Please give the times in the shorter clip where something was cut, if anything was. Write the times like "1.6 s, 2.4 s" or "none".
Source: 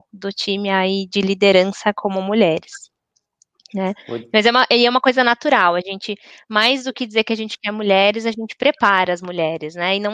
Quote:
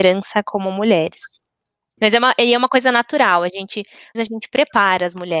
2.0 s, 4.1 s